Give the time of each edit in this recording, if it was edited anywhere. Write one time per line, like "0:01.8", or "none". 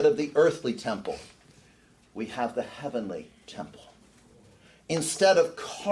none